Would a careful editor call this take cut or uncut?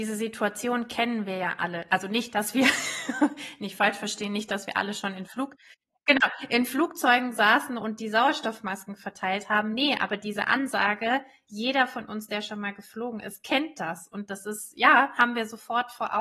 uncut